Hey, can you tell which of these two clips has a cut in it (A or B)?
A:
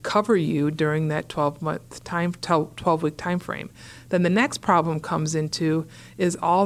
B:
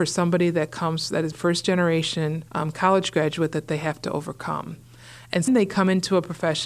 B